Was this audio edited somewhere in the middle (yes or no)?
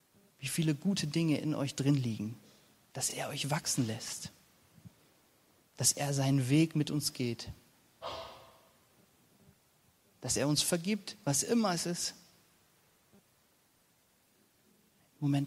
no